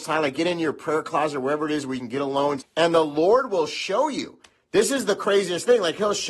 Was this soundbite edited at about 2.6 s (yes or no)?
yes